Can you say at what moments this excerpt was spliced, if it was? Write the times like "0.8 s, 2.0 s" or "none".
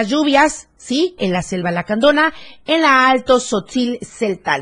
1.2 s